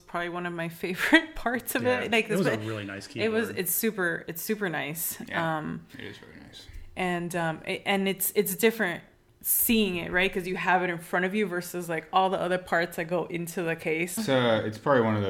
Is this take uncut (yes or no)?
no